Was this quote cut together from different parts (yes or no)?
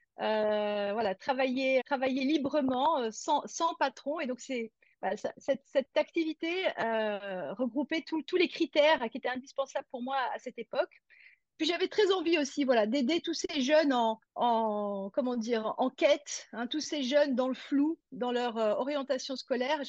yes